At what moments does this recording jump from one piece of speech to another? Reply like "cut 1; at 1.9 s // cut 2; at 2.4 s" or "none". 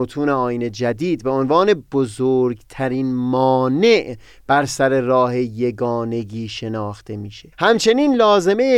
cut 1; at 7.5 s